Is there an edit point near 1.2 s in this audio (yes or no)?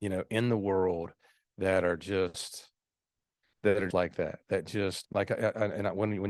no